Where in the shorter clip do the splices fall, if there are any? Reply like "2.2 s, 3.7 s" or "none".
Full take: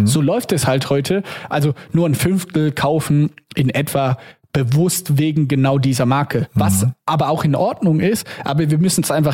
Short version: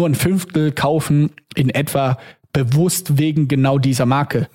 none

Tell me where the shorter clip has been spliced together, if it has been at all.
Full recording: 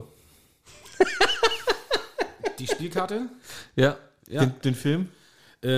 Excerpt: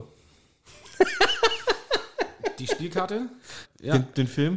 3.6 s

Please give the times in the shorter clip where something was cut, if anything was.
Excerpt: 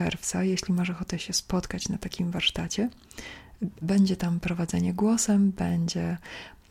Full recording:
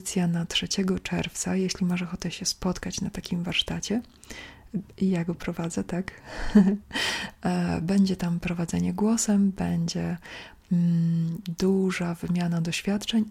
3.8 s

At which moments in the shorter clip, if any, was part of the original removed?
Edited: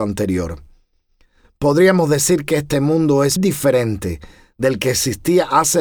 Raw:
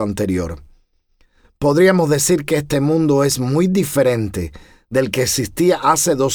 3.4 s

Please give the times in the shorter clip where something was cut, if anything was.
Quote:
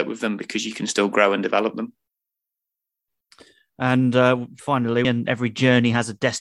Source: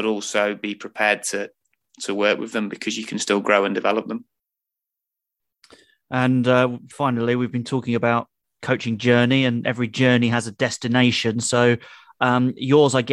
5.0 s

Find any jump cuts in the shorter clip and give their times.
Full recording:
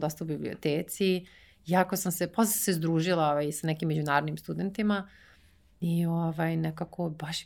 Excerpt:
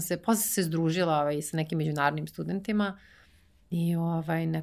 none

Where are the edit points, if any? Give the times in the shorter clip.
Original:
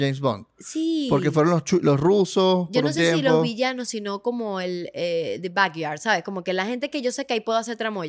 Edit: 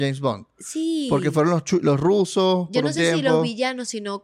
none

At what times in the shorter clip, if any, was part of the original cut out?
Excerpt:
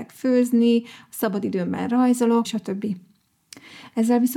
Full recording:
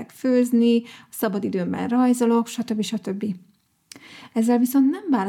2.4 s

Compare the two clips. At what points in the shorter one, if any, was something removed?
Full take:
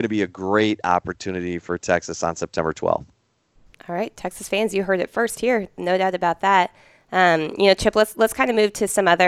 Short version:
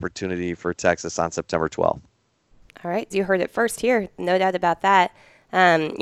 3.1 s

